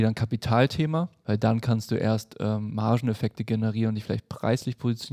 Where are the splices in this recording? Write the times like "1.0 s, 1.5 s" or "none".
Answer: 1.2 s